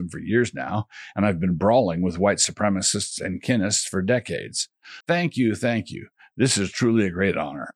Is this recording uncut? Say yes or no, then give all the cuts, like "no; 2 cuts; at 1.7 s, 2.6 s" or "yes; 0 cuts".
no; 1 cut; at 5.0 s